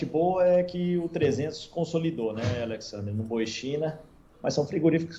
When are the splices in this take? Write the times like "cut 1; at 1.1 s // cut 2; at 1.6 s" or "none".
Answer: cut 1; at 4.3 s